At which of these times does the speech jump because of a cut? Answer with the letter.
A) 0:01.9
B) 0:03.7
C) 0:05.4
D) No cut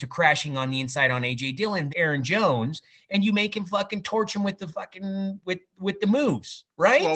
A